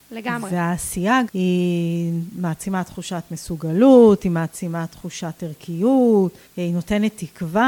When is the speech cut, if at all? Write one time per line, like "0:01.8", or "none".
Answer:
0:01.3
0:06.5